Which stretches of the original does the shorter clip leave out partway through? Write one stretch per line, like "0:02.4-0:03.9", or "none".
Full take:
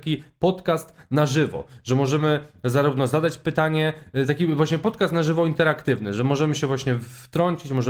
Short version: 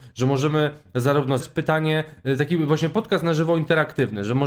0:03.1-0:03.3